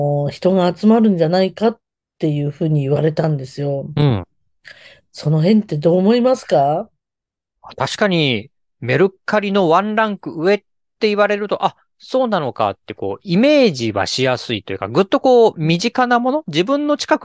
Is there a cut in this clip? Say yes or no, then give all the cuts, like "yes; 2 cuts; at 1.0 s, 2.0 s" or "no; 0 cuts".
no; 0 cuts